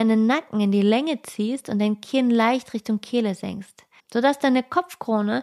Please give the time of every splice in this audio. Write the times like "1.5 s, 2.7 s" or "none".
4.0 s